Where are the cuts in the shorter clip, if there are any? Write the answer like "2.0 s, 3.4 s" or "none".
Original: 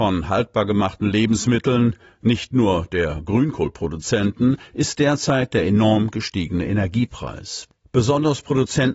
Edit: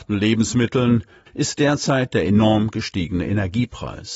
1.3 s